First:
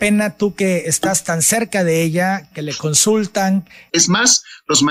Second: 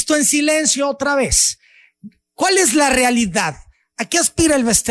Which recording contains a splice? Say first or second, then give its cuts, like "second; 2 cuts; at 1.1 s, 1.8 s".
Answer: first; 2 cuts; at 2.5 s, 3.9 s